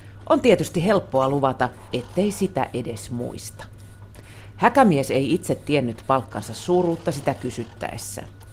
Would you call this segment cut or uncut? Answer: cut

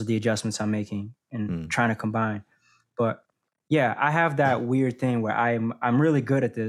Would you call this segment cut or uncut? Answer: uncut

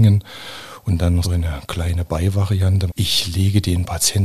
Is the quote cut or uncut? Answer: cut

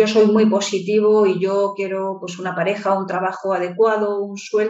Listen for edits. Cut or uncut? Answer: uncut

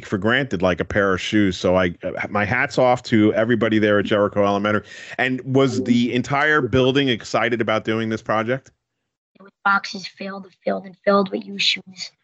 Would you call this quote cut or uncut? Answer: cut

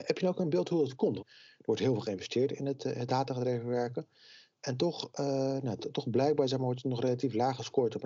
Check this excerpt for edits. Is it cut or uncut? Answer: cut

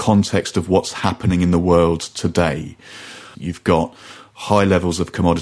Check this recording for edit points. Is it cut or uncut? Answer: cut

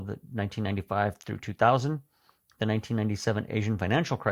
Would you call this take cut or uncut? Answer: uncut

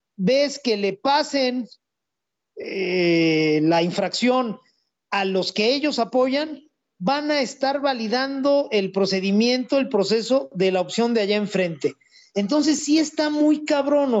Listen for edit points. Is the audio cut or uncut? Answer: uncut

